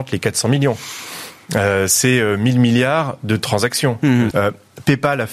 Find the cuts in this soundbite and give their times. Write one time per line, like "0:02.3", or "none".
0:04.3